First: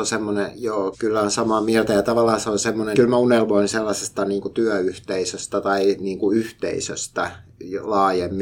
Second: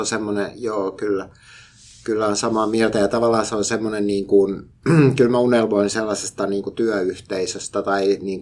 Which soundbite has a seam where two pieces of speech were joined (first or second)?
first